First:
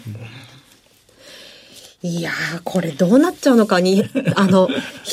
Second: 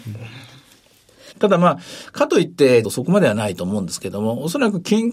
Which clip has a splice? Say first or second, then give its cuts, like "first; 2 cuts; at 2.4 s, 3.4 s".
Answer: second; 2 cuts; at 1.3 s, 2.8 s